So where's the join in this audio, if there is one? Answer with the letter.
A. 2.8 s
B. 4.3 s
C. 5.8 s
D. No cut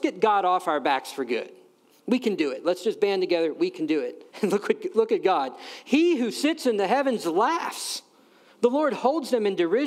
B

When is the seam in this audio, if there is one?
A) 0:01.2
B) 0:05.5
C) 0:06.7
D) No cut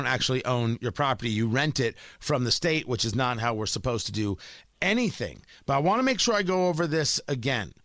D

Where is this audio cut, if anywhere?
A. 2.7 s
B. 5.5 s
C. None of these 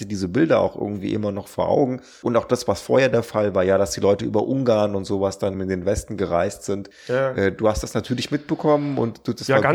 B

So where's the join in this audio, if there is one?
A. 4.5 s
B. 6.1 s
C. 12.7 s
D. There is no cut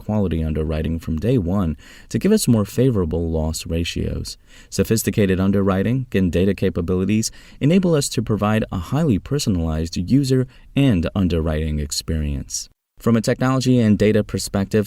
B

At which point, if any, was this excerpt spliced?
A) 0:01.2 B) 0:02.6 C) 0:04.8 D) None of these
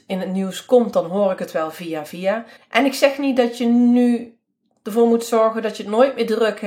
B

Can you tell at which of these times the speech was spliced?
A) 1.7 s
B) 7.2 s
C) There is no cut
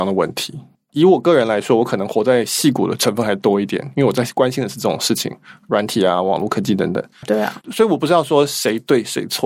B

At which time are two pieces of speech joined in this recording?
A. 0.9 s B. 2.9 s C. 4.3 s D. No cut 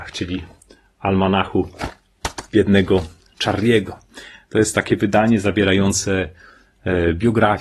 D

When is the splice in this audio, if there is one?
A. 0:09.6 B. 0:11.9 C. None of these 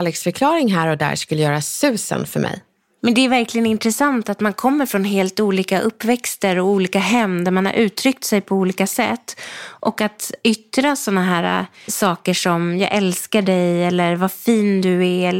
B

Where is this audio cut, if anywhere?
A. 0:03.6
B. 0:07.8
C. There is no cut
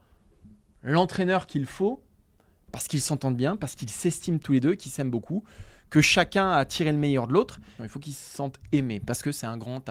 B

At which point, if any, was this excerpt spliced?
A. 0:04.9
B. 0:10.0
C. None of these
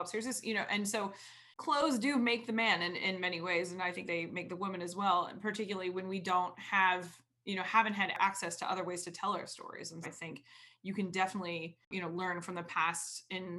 B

